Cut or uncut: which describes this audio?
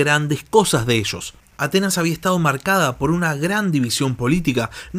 cut